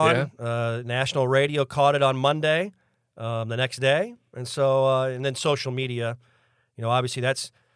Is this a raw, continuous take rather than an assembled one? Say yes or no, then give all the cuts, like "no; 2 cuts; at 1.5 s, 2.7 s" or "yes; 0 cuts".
yes; 0 cuts